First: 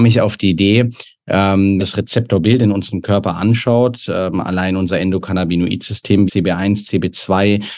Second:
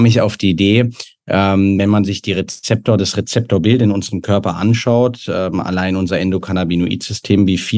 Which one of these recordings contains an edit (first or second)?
first